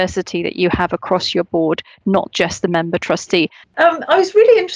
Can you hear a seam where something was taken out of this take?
yes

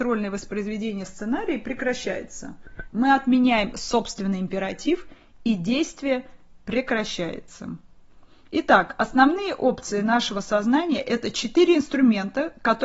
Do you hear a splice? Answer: no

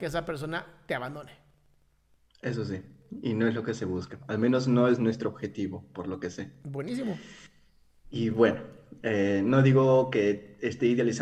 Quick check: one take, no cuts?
yes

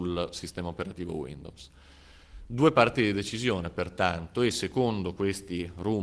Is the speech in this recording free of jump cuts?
yes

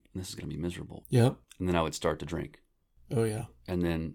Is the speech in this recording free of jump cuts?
no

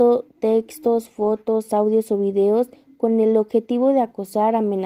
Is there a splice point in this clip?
no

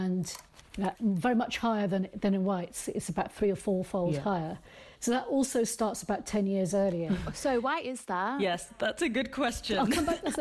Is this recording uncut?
no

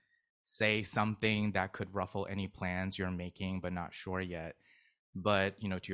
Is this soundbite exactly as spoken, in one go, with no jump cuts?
yes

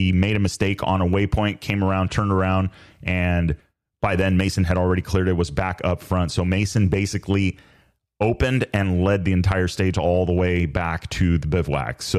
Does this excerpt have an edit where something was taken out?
no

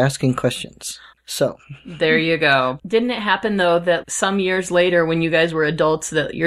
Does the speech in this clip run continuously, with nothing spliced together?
no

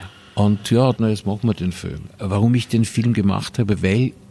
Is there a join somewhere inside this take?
yes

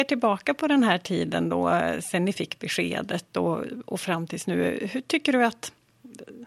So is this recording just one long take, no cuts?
yes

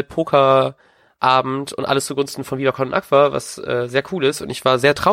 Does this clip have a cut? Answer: no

